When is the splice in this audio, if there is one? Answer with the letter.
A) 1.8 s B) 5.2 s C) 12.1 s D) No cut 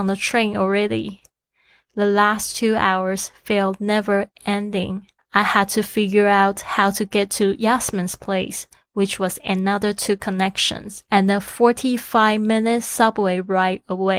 B